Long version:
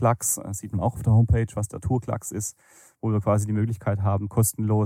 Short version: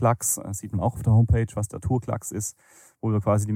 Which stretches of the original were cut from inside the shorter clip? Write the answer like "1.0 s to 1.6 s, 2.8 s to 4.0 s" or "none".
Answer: none